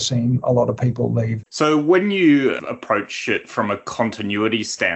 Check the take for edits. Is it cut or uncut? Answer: cut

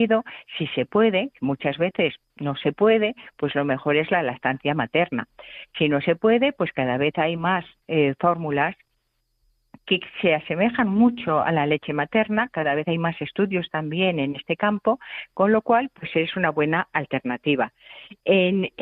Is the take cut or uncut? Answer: uncut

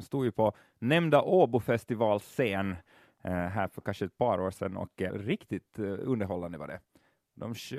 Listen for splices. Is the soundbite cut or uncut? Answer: cut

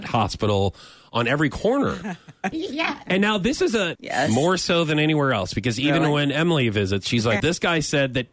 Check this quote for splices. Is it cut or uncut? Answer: cut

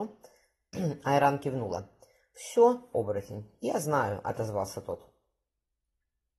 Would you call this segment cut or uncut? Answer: cut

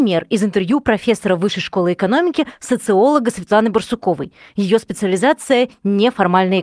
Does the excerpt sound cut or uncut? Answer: uncut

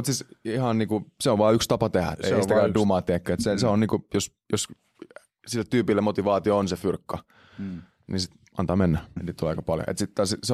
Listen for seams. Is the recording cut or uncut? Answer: cut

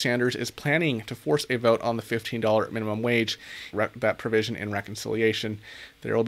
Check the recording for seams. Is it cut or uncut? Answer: cut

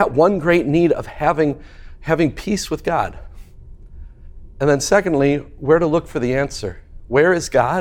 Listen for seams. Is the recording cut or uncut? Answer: uncut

